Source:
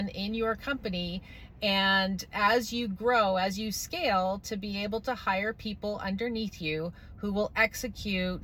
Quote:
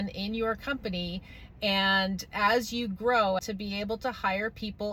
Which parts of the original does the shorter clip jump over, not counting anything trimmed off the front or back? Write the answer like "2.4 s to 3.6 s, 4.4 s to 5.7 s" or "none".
3.4 s to 4.4 s